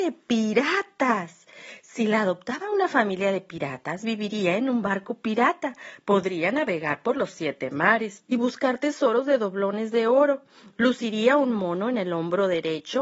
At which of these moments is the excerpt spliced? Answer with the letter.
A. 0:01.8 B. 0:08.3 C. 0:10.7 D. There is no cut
B